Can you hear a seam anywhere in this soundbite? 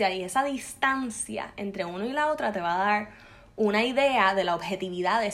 no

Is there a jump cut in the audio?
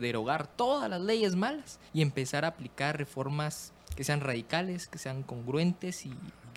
yes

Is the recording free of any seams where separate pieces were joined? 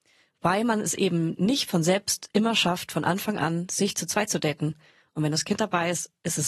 yes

